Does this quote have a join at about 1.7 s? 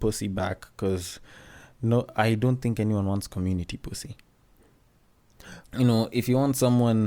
no; 1 cut; at 5.6 s

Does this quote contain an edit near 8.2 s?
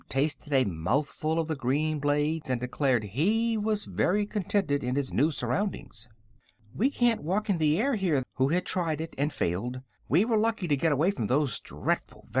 yes; 2 cuts; at 8.2 s, 10.0 s

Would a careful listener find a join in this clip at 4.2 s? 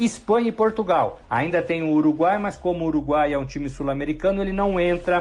no; 1 cut; at 1.2 s

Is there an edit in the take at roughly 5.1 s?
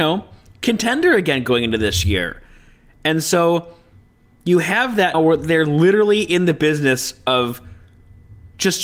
yes; 1 cut; at 5.1 s

